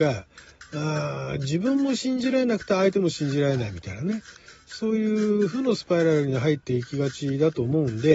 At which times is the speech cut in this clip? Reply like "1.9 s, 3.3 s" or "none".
none